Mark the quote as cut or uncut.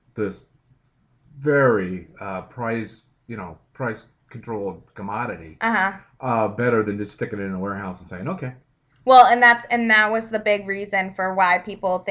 uncut